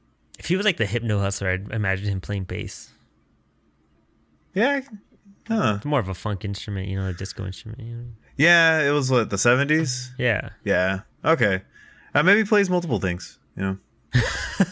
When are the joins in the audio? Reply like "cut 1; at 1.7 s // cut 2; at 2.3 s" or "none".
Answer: none

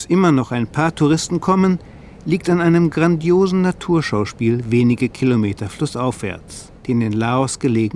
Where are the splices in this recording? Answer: cut 1; at 6.8 s

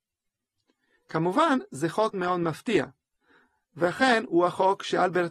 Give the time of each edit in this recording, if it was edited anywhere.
cut 1; at 2.1 s

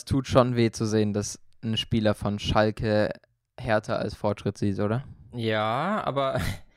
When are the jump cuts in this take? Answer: none

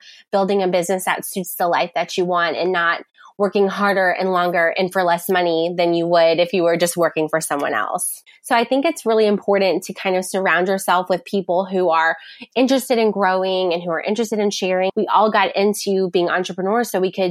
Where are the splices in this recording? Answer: cut 1; at 8.3 s // cut 2; at 14.9 s

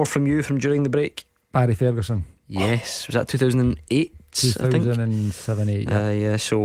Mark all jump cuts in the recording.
none

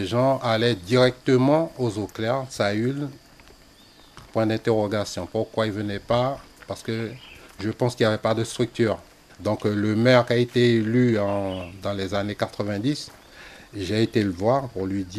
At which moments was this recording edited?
none

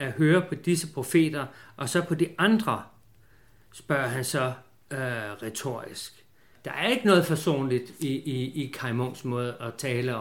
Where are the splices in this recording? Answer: cut 1; at 6.6 s

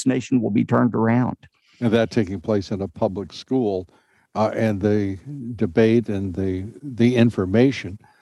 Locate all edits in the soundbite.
none

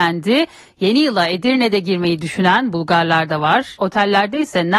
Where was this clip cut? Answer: cut 1; at 3.8 s

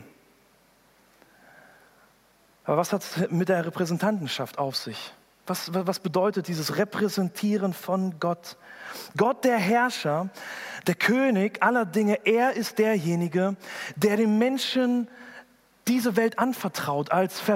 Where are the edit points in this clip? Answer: none

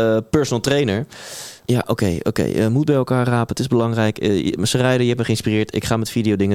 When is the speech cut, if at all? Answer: cut 1; at 1.6 s

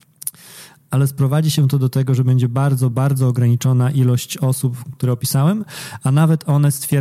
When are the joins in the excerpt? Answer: cut 1; at 2.9 s // cut 2; at 4.9 s

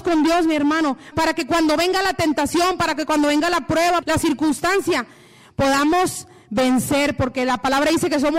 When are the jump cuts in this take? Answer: cut 1; at 1.1 s // cut 2; at 4.0 s

